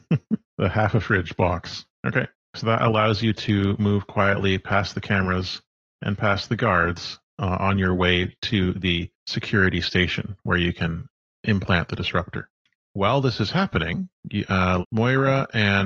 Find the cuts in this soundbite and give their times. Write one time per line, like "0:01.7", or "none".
0:14.8